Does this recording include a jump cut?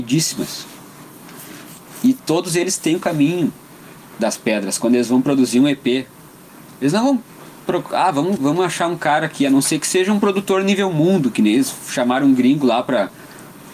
yes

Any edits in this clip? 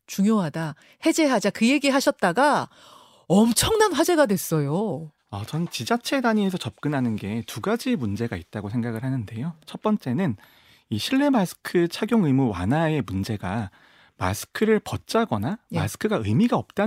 yes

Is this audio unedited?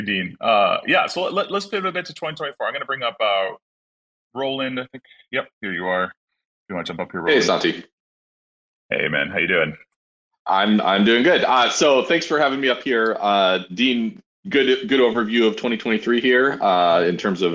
yes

